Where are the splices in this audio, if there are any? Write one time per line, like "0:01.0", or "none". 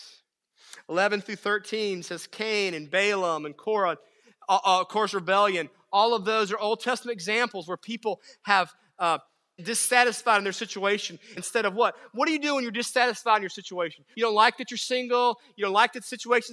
0:09.6
0:11.4
0:14.1